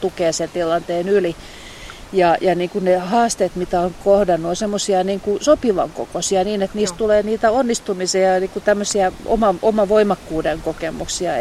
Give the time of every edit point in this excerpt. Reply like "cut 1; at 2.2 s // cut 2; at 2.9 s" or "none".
none